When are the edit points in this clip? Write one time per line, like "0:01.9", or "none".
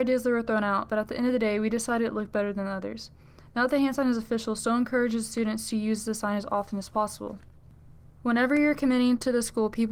none

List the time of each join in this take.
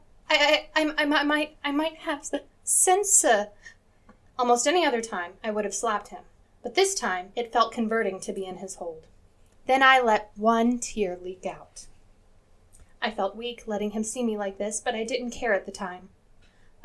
0:04.3
0:09.5
0:13.0

